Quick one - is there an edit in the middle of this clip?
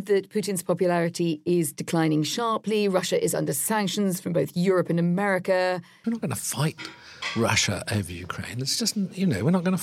yes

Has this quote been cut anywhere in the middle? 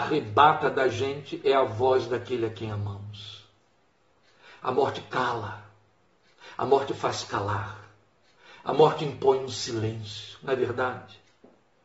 no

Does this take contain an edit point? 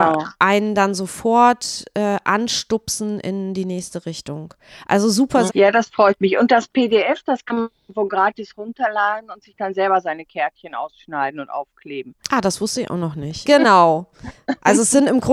yes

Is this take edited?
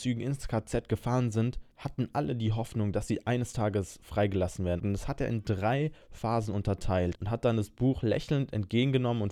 yes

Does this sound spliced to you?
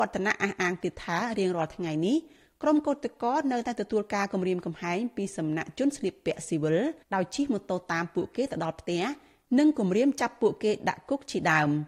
yes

